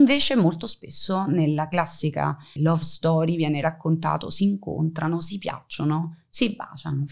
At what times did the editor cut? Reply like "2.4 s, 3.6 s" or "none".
2.6 s